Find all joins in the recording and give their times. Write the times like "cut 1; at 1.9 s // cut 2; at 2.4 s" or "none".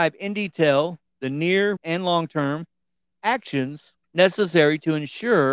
cut 1; at 1.8 s // cut 2; at 4.0 s